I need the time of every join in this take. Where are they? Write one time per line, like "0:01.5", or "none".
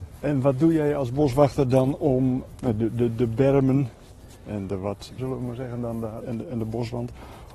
0:05.2
0:06.2